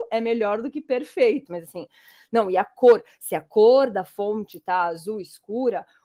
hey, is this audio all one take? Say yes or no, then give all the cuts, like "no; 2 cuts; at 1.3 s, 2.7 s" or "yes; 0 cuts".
no; 1 cut; at 1.5 s